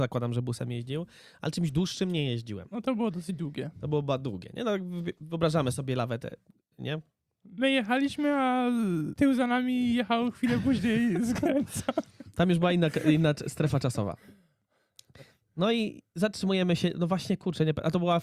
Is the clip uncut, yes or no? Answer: yes